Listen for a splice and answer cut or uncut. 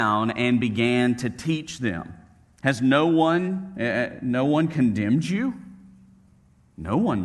cut